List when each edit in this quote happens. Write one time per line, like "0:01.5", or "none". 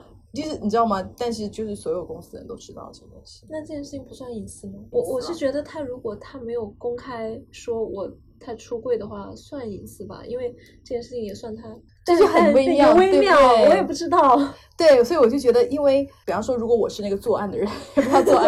0:04.9